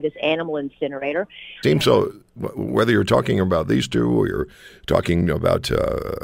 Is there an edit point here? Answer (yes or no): yes